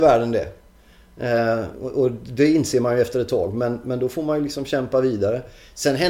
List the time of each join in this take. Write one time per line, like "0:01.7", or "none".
0:01.7